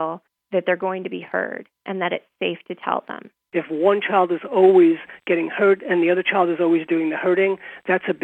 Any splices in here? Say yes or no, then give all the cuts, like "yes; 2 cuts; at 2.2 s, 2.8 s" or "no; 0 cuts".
yes; 1 cut; at 3.5 s